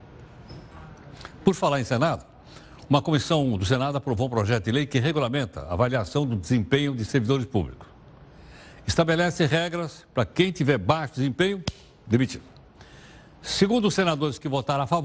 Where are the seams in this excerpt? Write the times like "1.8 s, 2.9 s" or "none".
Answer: none

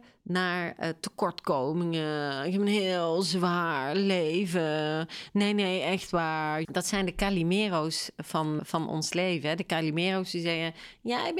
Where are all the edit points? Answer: 6.6 s, 8.6 s

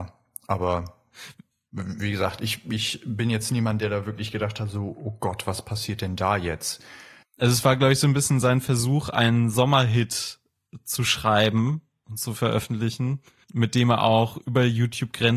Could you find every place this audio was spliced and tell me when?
7.2 s, 13.4 s

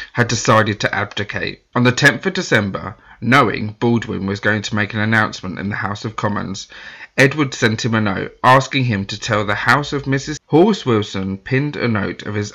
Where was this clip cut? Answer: 1.7 s, 10.4 s

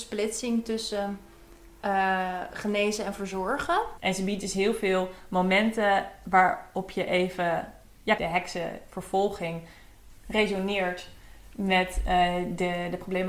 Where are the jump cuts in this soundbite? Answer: 4.0 s, 8.2 s

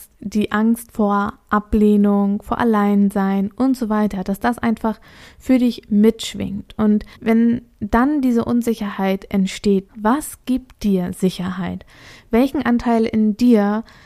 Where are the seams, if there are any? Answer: 7.1 s, 9.9 s

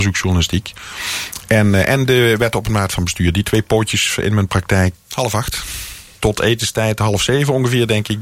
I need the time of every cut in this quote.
4.9 s, 6.2 s

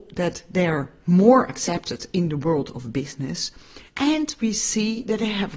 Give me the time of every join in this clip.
3.9 s

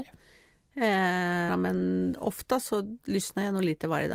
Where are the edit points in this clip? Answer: 1.5 s

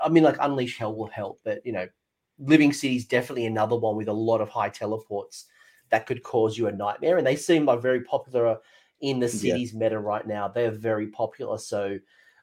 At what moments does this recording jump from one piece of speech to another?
none

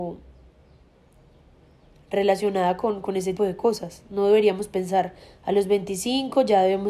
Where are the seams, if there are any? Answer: 3.4 s

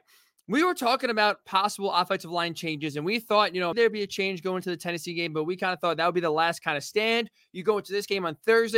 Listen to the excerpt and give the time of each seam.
3.7 s

